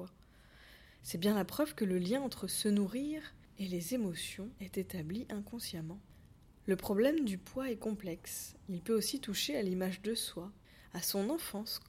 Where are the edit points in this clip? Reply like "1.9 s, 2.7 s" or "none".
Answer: 1.0 s